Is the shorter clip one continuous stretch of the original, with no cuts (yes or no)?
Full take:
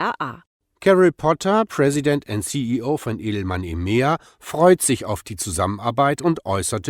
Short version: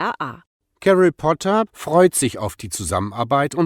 no